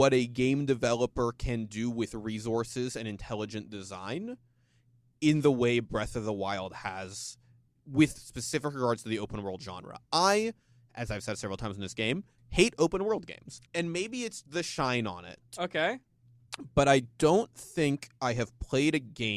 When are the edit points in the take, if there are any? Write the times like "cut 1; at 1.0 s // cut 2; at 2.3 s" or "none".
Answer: cut 1; at 12.4 s // cut 2; at 13.7 s